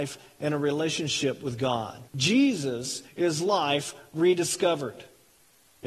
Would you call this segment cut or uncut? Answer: cut